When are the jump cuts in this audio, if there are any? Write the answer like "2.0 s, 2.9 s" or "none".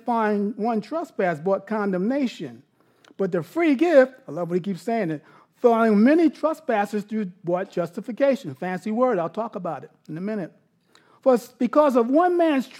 none